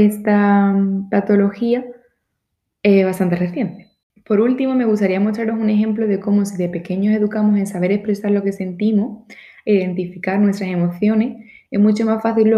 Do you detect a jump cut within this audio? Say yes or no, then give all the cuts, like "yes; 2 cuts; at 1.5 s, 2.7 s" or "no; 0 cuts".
no; 0 cuts